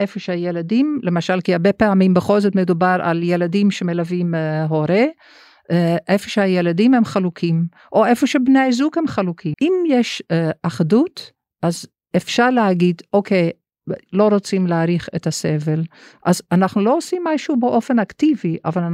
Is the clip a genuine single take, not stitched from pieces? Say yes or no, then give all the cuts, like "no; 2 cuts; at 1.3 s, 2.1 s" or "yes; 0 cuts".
no; 2 cuts; at 9.5 s, 14.1 s